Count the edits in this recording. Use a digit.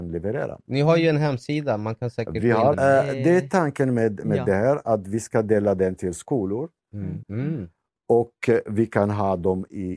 2